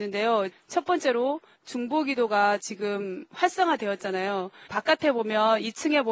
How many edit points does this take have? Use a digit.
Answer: 1